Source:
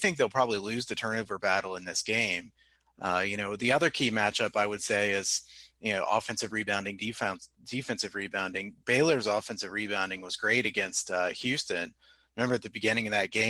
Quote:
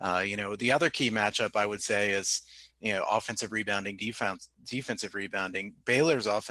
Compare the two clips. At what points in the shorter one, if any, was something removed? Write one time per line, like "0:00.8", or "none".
none